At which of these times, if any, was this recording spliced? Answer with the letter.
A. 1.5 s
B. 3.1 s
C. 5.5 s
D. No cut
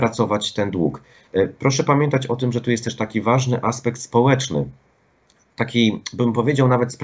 D